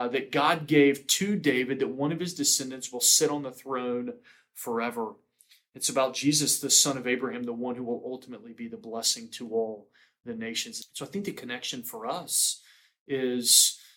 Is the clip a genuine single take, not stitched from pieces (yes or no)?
no